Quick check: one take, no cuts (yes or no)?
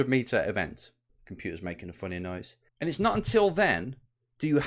no